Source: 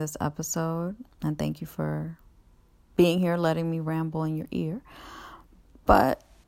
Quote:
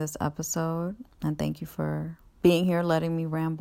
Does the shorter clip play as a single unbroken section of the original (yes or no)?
no